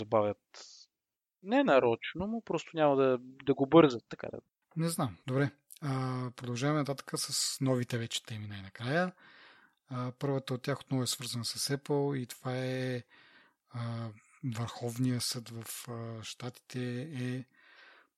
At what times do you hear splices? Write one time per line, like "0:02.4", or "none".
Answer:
0:05.2